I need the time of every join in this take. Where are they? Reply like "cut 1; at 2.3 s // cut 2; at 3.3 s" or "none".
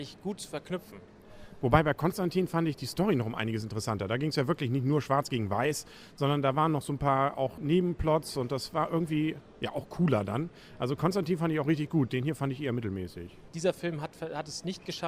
cut 1; at 7.6 s // cut 2; at 13.5 s